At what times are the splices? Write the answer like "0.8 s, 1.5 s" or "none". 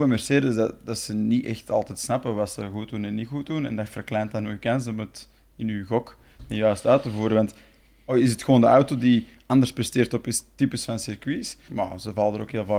11.7 s